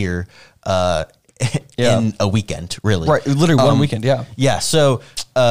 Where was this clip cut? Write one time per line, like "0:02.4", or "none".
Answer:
none